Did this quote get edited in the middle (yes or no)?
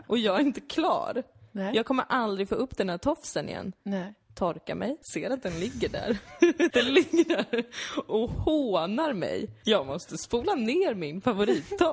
yes